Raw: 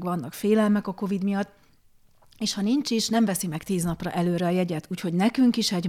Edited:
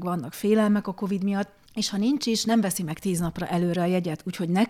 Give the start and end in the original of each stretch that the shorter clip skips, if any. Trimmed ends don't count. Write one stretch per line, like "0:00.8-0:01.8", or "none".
0:01.7-0:02.3